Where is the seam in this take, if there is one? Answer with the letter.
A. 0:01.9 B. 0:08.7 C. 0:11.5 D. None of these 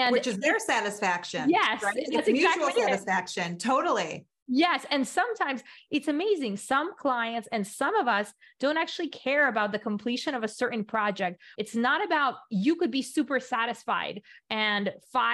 C